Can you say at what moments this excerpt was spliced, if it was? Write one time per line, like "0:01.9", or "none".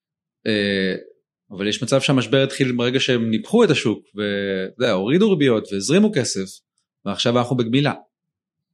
0:01.3